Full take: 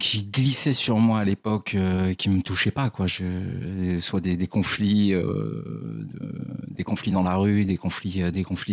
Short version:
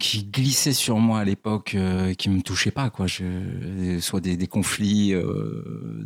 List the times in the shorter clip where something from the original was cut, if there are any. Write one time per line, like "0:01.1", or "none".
none